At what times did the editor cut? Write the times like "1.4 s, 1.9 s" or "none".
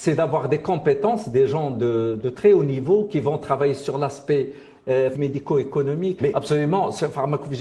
5.1 s, 6.2 s